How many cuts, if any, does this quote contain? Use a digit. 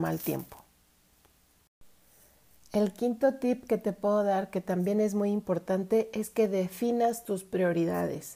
0